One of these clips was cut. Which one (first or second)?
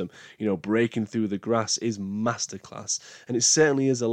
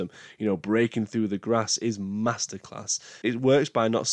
second